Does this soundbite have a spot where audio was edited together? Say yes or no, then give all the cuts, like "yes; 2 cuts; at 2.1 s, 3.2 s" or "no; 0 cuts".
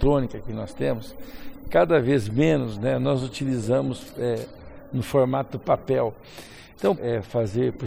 yes; 1 cut; at 7.0 s